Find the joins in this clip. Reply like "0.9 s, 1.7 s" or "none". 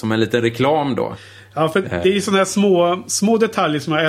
none

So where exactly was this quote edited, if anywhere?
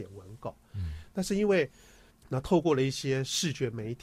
2.1 s

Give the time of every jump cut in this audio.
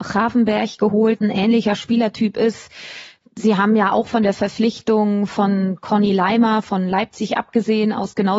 1.2 s

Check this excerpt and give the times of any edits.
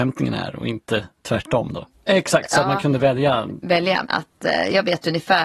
2.1 s, 4.0 s

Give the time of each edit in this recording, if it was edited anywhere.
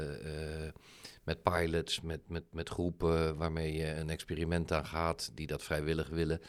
2.0 s

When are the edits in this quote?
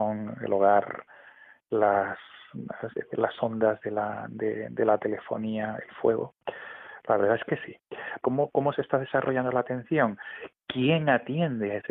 8.2 s

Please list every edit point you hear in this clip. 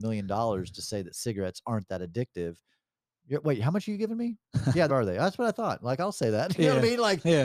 4.9 s

